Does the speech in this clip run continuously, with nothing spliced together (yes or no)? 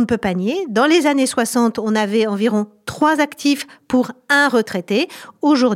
yes